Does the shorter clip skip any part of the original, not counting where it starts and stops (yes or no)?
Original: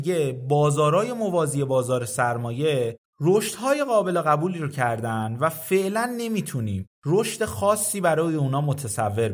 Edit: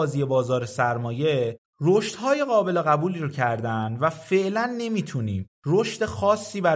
no